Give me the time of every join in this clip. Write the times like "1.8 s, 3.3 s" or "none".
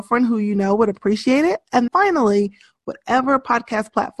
1.9 s